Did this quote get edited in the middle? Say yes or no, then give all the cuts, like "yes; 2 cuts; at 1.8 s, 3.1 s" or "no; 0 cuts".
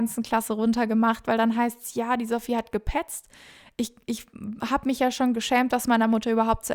no; 0 cuts